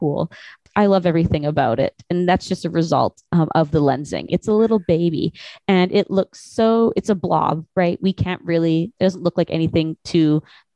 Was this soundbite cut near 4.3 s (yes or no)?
yes